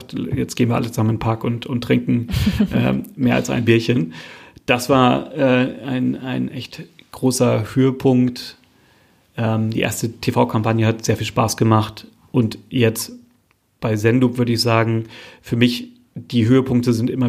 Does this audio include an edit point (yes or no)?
no